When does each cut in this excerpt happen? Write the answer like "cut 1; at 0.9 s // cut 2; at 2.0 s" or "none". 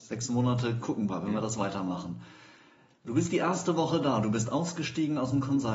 none